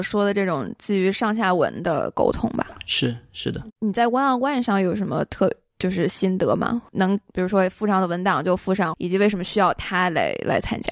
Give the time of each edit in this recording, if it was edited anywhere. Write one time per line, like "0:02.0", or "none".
0:06.9
0:08.9